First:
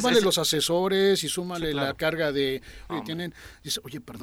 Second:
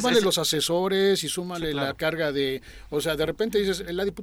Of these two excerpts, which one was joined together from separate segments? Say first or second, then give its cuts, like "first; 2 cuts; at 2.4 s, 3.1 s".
first; 1 cut; at 2.9 s